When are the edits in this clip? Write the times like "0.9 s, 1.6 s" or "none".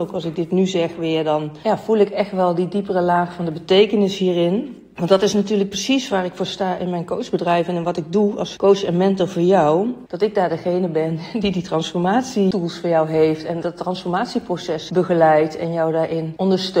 10.1 s